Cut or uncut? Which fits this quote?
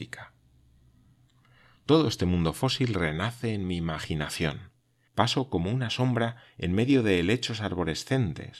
cut